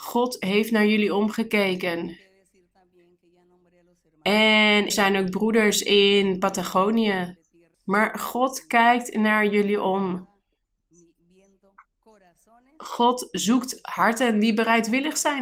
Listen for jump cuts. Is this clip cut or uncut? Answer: cut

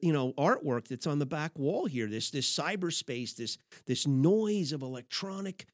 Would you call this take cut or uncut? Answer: uncut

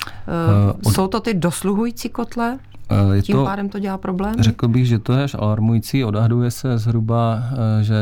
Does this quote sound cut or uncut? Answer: uncut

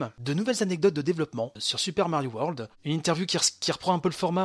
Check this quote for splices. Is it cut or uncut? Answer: uncut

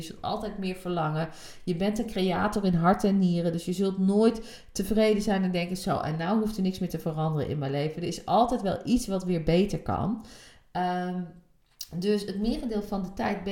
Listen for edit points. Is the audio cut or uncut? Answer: uncut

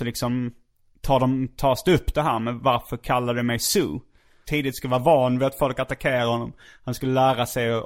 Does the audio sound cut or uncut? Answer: cut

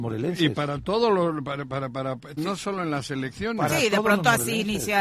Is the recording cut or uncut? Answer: cut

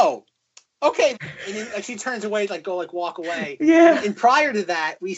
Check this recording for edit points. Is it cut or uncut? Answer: cut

